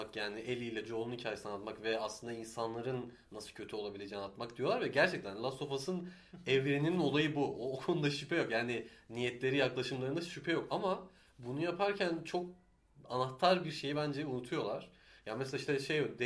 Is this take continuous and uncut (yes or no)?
yes